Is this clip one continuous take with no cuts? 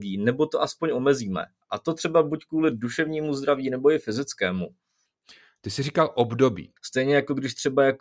no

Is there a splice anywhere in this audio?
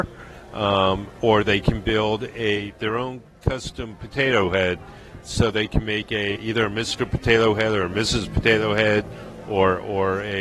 yes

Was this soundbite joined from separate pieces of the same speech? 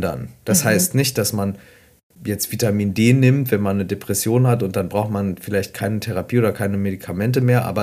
no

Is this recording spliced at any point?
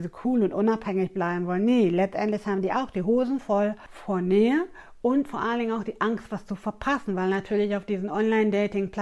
no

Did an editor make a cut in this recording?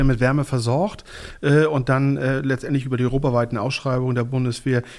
no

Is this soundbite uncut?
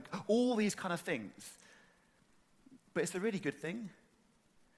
no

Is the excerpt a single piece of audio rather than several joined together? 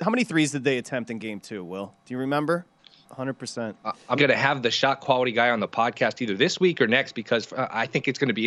no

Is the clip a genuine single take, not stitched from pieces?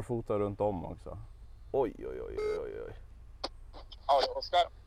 yes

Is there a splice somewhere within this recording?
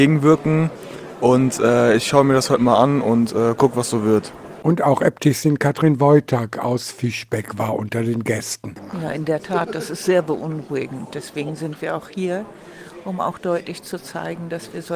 no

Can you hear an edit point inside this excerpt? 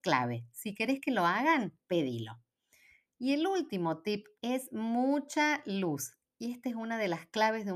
yes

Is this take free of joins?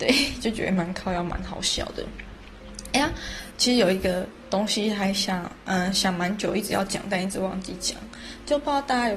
yes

